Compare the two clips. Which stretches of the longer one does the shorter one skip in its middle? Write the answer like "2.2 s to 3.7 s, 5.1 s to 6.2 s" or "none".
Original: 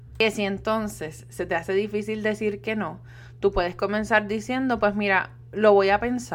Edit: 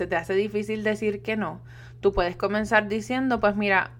none